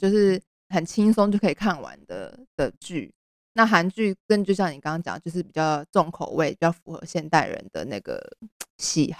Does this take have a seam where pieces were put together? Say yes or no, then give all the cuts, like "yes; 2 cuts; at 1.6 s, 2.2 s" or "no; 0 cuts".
no; 0 cuts